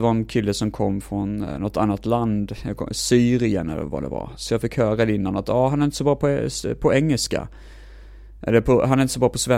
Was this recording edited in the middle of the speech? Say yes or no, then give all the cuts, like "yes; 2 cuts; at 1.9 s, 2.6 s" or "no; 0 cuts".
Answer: no; 0 cuts